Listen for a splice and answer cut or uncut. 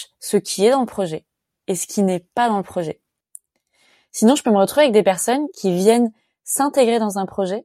uncut